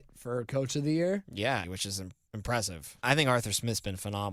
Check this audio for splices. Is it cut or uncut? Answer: cut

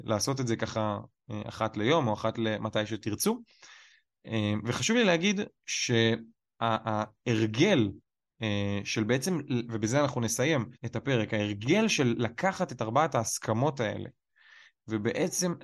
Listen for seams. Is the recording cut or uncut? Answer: cut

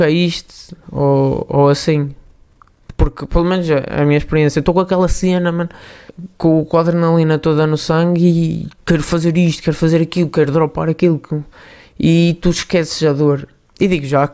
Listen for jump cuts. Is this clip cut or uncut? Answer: uncut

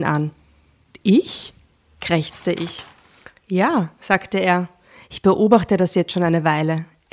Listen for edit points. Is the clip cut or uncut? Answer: uncut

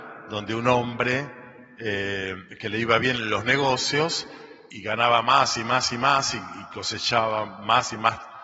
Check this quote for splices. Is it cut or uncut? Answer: cut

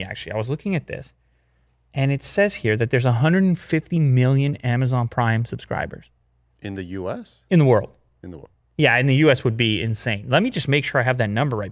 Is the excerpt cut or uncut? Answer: uncut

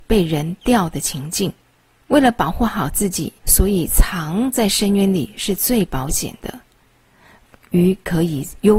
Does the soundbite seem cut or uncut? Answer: cut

